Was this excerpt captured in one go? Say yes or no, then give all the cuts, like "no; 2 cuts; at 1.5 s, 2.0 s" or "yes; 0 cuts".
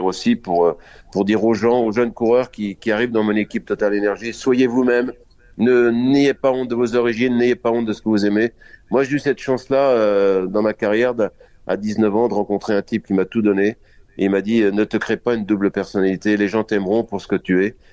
yes; 0 cuts